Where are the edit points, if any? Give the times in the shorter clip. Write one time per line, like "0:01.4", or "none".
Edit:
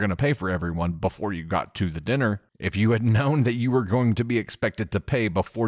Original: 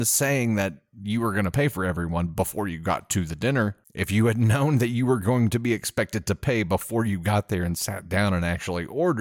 none